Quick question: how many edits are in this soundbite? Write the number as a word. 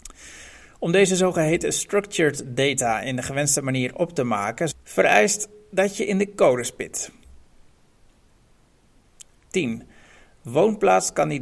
two